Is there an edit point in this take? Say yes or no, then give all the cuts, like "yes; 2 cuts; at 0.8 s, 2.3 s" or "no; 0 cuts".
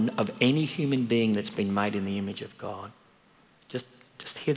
no; 0 cuts